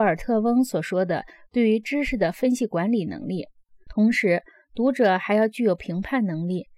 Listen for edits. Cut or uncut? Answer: cut